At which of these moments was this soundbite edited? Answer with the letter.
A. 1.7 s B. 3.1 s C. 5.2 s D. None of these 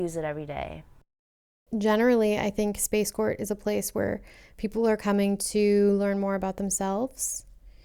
A